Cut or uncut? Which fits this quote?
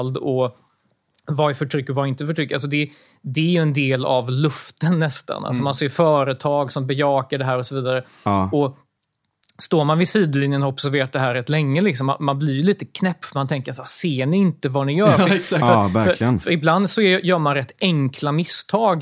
uncut